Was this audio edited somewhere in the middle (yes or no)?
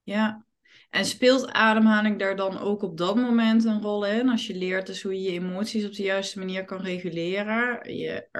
no